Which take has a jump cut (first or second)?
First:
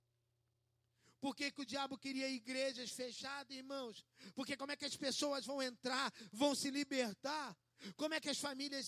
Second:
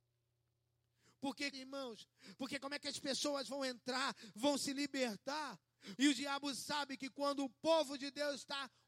second